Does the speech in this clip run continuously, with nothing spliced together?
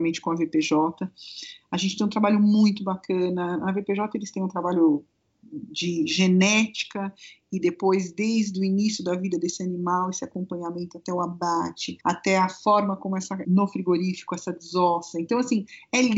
no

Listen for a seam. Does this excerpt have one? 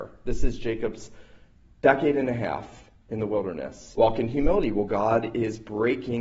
yes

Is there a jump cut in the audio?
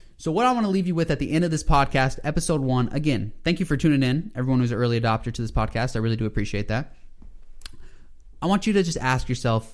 no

